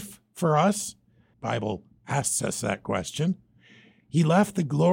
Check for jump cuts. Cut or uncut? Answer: cut